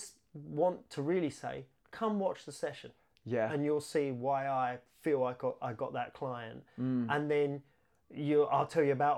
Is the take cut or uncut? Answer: uncut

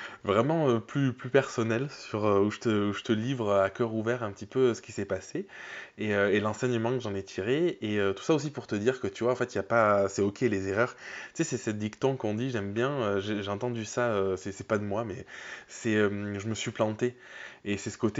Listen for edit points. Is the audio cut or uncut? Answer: uncut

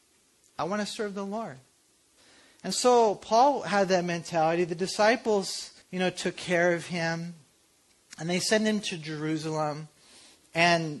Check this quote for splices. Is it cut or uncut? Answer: cut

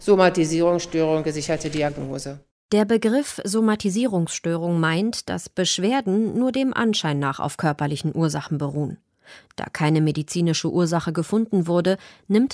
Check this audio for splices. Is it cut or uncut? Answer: uncut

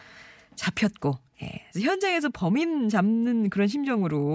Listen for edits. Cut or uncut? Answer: cut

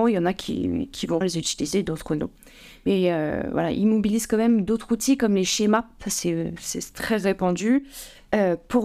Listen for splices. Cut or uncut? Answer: cut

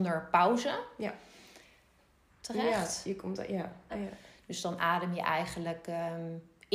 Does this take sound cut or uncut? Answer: cut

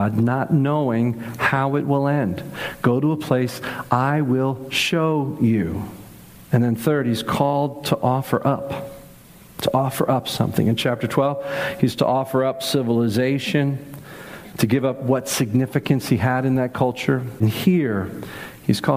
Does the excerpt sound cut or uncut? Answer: uncut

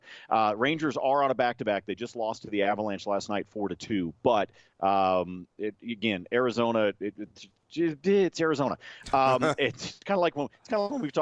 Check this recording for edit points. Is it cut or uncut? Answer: uncut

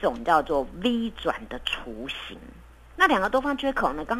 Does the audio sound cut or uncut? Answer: cut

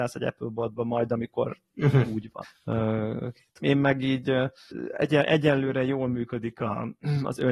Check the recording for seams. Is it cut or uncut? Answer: cut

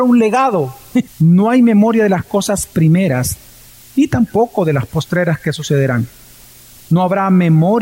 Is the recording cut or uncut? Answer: cut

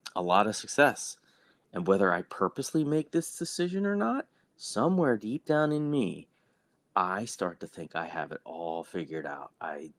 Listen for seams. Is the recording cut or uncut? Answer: uncut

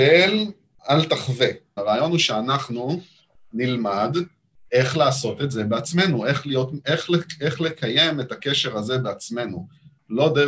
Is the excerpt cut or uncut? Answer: cut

